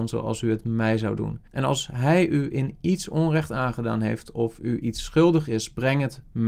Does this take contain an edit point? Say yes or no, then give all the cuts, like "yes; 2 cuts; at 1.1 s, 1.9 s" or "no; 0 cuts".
yes; 1 cut; at 1.5 s